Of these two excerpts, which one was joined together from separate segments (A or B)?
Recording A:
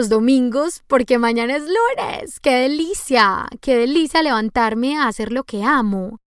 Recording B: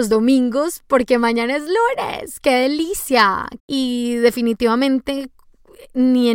B